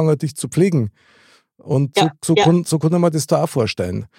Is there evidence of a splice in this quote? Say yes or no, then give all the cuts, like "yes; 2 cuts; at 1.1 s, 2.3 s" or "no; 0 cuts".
no; 0 cuts